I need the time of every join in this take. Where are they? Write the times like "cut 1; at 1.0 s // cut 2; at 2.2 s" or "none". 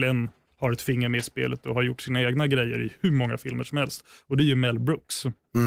none

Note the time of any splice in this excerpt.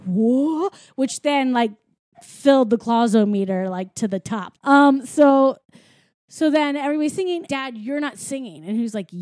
cut 1; at 4.5 s // cut 2; at 7.5 s

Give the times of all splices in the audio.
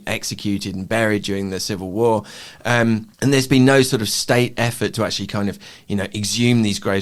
cut 1; at 3.1 s

